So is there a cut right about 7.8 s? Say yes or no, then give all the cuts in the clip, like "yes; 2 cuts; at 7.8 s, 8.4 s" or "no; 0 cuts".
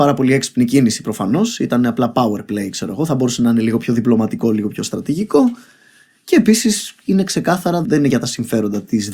yes; 1 cut; at 7.8 s